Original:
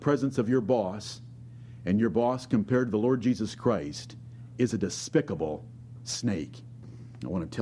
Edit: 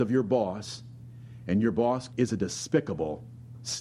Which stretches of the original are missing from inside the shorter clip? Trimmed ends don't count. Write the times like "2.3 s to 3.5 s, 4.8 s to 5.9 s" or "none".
2.5 s to 4.5 s